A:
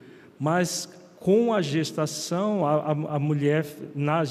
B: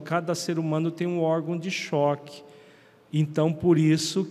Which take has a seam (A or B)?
B